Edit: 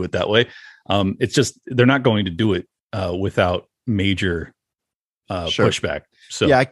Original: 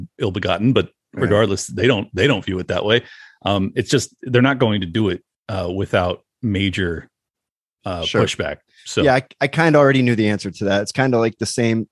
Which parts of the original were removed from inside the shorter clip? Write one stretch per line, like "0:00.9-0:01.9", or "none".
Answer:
none